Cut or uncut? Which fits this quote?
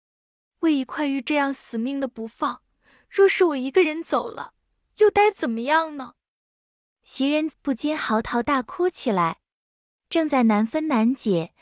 cut